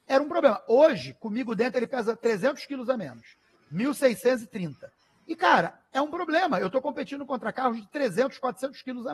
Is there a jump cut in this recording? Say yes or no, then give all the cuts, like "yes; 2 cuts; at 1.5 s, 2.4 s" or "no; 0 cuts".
no; 0 cuts